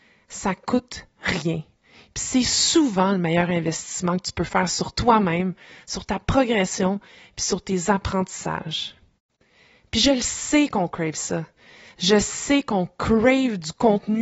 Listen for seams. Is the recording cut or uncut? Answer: uncut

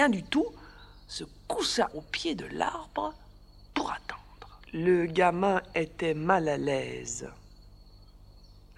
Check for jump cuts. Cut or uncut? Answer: cut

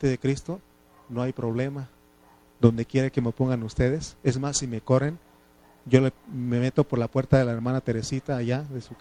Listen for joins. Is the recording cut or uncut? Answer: uncut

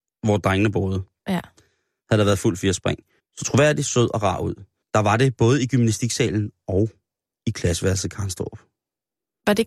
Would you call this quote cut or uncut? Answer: cut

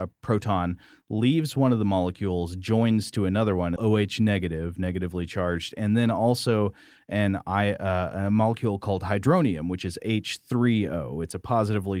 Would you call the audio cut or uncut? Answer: cut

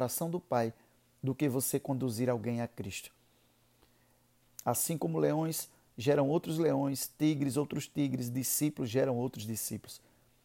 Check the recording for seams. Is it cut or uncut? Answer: cut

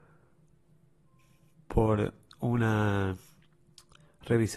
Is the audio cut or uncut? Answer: uncut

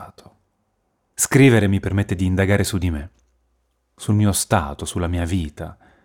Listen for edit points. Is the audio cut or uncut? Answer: cut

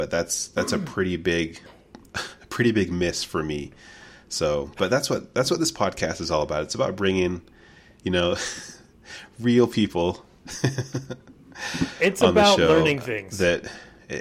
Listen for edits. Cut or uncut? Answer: uncut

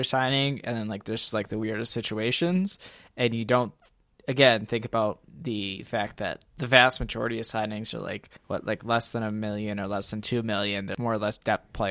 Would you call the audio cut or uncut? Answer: cut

